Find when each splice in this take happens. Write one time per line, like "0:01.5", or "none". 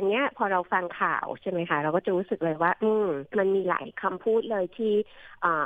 0:03.3